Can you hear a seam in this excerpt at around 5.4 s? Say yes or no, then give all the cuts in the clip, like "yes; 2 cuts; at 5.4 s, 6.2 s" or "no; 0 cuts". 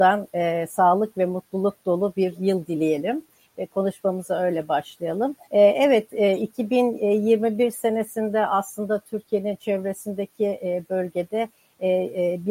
yes; 1 cut; at 5.4 s